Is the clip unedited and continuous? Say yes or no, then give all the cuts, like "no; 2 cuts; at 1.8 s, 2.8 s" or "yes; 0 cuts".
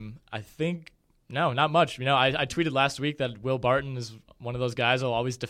yes; 0 cuts